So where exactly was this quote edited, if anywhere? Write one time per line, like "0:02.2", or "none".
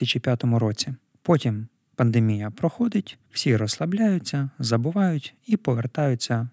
0:01.1
0:03.2